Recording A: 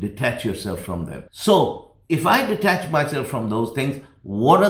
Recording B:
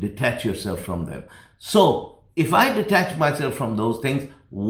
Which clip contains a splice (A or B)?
A